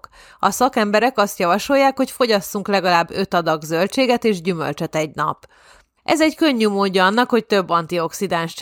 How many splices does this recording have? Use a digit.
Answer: 1